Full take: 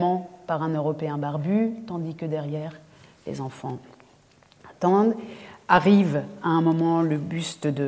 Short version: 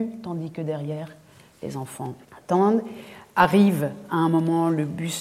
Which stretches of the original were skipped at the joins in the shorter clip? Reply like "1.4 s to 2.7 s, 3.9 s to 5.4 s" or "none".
3.9 s to 4.6 s